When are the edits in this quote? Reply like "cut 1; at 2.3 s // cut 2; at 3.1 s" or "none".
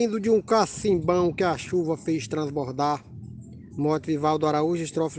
cut 1; at 3.7 s